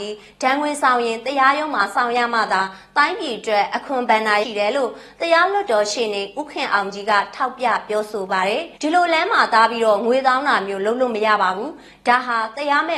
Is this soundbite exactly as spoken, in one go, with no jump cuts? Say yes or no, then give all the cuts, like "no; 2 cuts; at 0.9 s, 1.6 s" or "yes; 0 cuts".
no; 2 cuts; at 4.4 s, 8.8 s